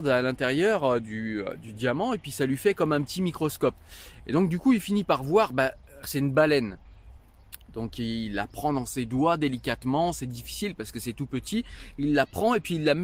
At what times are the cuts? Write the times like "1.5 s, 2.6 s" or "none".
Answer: 6.0 s